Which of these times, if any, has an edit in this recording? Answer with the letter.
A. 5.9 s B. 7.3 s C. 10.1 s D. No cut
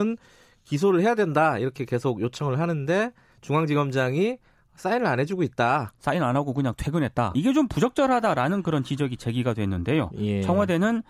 B